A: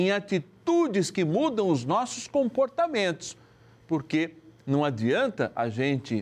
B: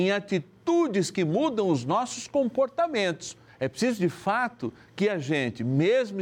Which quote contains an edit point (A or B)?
B